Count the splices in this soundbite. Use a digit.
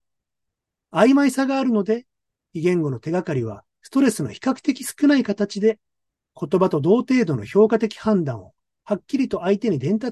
0